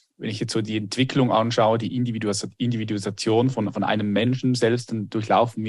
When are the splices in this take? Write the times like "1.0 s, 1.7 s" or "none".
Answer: none